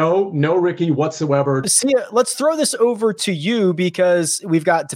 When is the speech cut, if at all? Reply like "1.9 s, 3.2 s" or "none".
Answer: 1.6 s